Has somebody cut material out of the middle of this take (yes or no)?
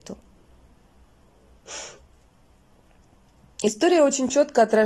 no